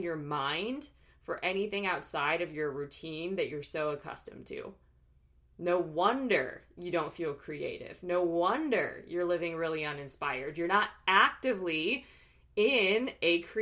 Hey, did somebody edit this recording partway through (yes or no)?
no